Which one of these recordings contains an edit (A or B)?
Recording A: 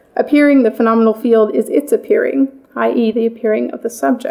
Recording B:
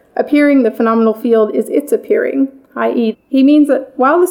B